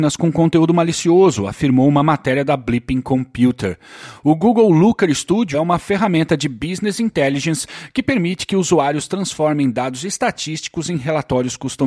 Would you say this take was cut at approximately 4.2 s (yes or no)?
no